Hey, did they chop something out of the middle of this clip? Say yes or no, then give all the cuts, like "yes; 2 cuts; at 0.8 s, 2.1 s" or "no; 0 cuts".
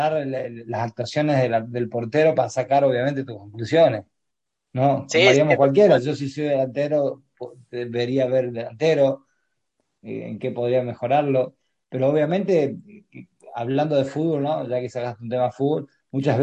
no; 0 cuts